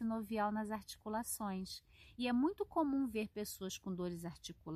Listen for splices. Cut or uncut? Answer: uncut